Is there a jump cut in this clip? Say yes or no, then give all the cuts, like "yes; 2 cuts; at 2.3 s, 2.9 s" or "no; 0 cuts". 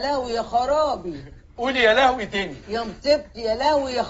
no; 0 cuts